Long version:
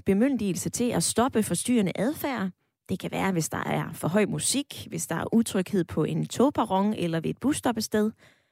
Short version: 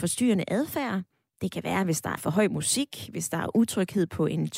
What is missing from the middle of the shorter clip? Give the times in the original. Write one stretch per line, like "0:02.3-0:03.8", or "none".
0:03.6-0:03.9